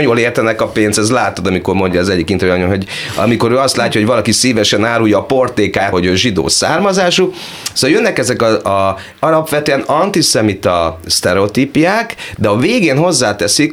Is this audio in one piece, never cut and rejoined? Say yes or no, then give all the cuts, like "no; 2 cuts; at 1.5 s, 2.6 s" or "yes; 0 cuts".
no; 1 cut; at 5.9 s